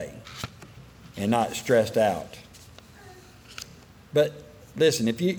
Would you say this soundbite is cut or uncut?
uncut